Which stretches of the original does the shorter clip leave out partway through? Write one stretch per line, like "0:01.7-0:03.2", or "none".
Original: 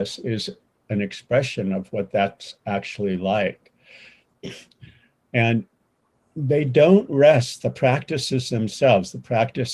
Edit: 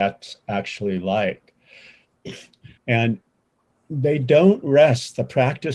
0:04.9-0:05.2